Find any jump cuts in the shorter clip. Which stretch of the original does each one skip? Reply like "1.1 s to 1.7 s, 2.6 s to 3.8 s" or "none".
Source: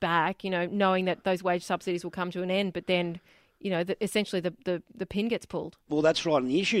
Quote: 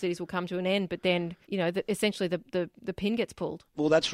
3.3 s to 3.6 s